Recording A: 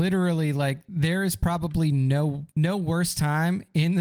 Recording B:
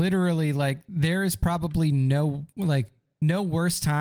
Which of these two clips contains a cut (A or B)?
A